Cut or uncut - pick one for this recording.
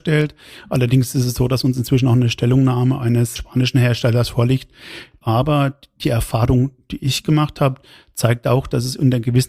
cut